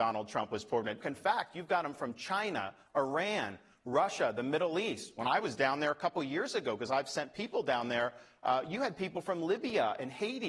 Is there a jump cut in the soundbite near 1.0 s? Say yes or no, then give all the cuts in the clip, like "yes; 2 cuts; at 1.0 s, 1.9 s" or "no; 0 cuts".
yes; 1 cut; at 1.0 s